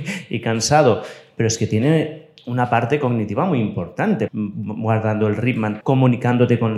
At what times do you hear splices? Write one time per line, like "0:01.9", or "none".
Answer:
0:04.3
0:05.8